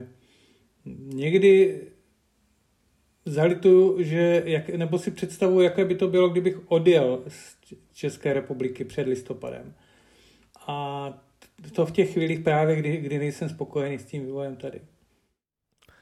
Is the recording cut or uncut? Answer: uncut